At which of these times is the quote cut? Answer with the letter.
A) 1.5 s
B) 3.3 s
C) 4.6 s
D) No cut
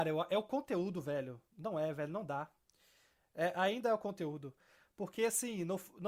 D